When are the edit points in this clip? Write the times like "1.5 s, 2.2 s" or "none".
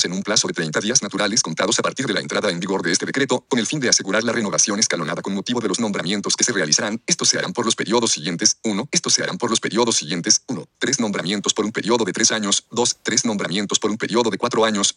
3.5 s, 8.9 s